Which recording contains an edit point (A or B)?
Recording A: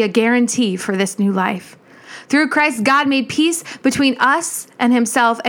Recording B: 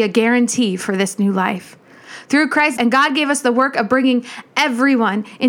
B